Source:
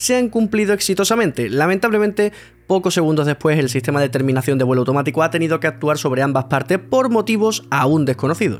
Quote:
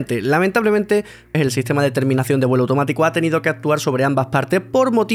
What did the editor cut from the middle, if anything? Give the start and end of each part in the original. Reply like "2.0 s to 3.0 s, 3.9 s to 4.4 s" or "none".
2.6 s to 3.5 s